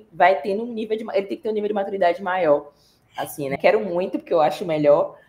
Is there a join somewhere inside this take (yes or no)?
yes